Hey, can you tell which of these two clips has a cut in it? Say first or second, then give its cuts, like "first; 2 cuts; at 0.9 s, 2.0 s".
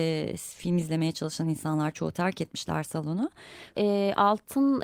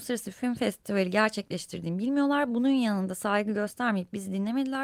first; 1 cut; at 3.7 s